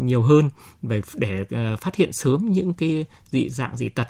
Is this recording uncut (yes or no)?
yes